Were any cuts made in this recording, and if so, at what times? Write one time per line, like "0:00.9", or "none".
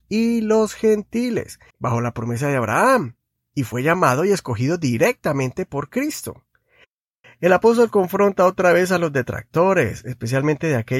0:01.7
0:07.2